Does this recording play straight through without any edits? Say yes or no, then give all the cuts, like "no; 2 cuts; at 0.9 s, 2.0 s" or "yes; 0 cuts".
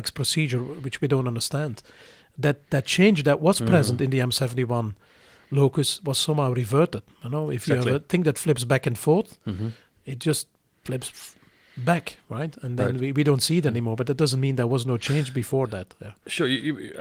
yes; 0 cuts